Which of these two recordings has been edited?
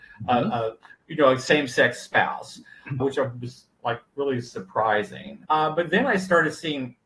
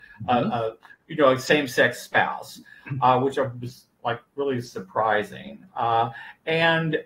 first; 2 cuts; at 3.0 s, 5.5 s

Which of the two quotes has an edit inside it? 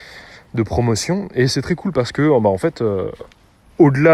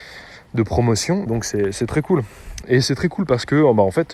second; 2 cuts; at 1.3 s, 2.6 s

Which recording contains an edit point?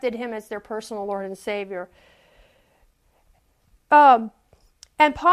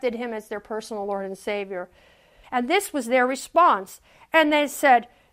second; 1 cut; at 2.4 s

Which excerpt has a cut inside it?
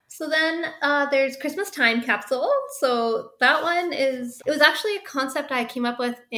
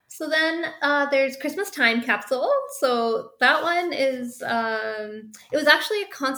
first; 1 cut; at 4.4 s

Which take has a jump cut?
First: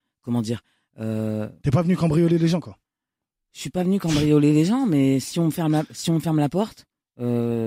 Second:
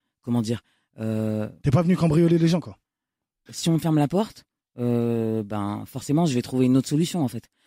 second; 1 cut; at 3.5 s

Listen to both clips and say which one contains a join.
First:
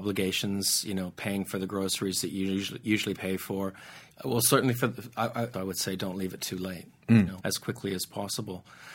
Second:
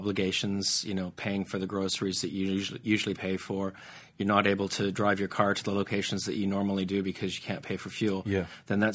first; 3 cuts; at 4.1 s, 5.5 s, 7.4 s

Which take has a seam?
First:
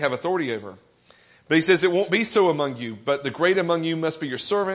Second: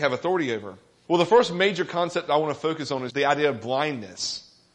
second; 2 cuts; at 1.0 s, 3.1 s

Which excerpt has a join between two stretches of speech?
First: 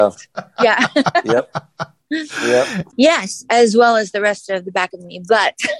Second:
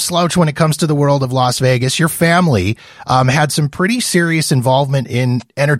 first; 1 cut; at 2.9 s

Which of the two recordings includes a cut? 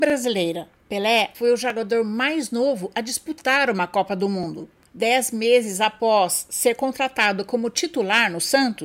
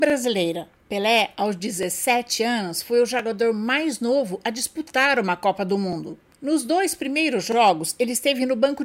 first; 2 cuts; at 1.3 s, 4.9 s

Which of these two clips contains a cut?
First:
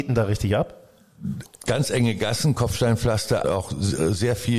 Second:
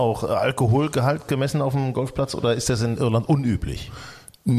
first; 2 cuts; at 1.5 s, 3.4 s

